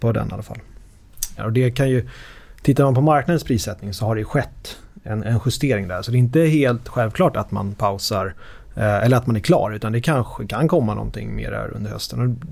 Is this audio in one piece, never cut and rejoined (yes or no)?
no